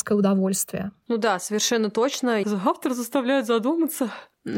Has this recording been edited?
yes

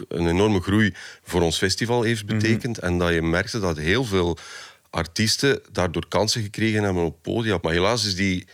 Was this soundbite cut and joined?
yes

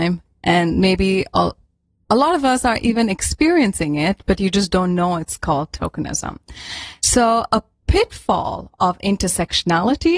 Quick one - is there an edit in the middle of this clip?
no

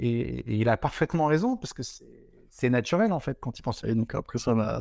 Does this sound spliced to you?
yes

